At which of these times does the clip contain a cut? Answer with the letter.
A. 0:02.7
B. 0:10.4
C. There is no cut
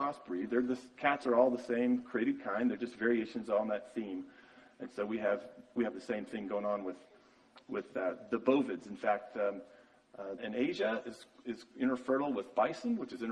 B